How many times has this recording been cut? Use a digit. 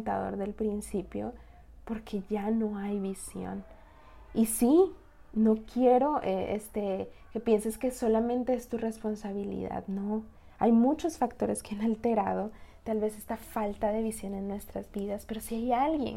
0